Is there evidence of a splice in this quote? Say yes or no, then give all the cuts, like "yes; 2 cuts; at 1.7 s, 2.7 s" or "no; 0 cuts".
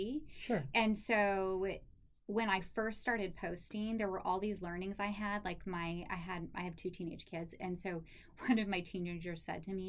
no; 0 cuts